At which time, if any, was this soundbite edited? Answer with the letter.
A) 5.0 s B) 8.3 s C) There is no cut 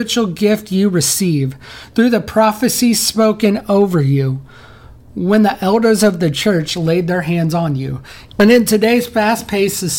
B